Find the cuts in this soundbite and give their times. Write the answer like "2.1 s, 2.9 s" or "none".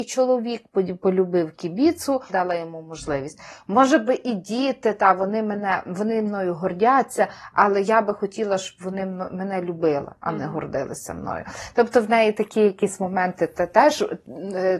2.3 s